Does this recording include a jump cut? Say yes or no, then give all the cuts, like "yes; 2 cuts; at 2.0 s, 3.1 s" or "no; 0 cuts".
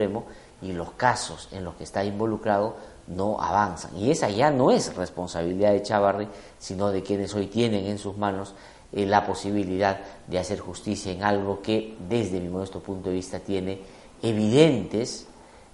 no; 0 cuts